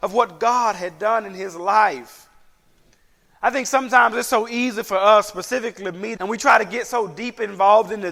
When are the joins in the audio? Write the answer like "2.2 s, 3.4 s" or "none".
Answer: 6.2 s